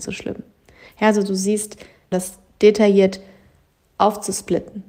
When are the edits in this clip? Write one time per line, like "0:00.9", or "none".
0:02.1